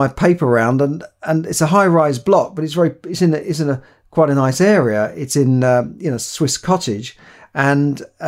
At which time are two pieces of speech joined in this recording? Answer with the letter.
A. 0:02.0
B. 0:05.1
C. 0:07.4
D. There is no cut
D